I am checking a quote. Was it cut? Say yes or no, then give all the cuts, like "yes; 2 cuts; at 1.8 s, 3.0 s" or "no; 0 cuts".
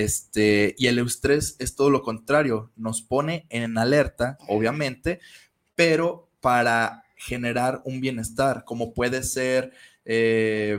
yes; 1 cut; at 4.4 s